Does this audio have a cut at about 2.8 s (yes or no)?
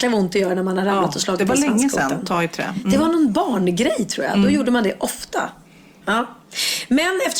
no